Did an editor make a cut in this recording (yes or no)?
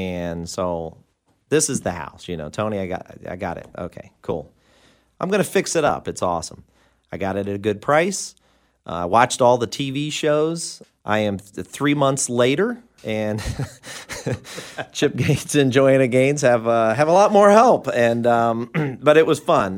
no